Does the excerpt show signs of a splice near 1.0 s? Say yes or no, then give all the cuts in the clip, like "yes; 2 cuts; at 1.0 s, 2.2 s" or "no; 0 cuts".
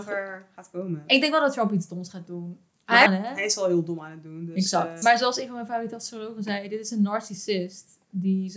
no; 2 cuts; at 3.1 s, 5.0 s